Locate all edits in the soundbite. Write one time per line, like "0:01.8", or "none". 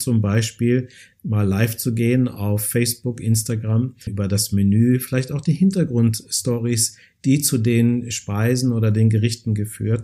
0:04.1